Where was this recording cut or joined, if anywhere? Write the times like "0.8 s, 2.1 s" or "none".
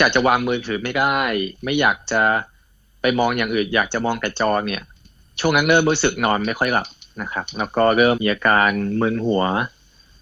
1.6 s, 8.1 s